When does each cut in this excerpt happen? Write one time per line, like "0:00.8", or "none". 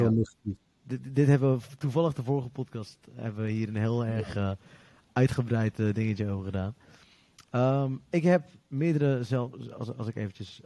none